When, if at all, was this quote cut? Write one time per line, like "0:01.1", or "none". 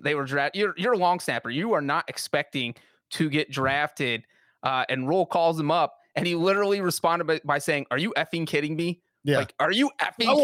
none